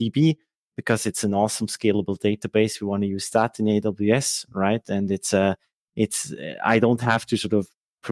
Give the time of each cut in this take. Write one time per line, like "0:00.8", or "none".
none